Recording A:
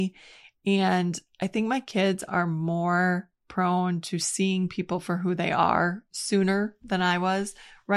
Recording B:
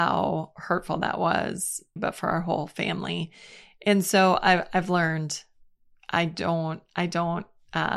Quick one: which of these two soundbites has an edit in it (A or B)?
B